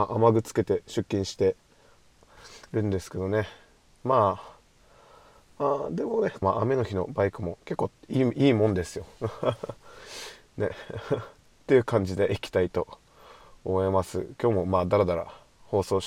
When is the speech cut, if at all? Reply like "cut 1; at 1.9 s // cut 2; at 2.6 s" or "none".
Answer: cut 1; at 6.4 s